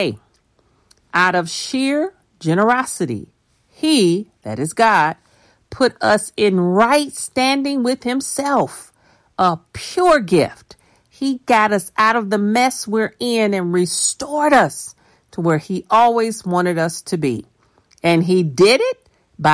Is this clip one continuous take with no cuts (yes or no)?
yes